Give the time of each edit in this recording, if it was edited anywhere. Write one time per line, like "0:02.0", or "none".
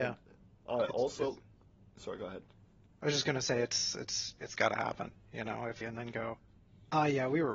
0:04.4
0:05.8